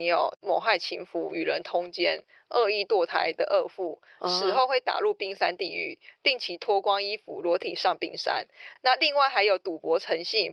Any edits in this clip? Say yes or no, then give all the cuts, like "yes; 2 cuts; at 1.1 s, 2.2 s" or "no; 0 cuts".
no; 0 cuts